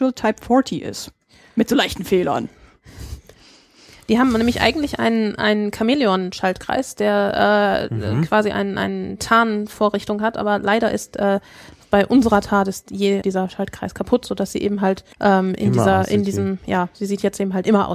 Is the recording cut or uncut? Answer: cut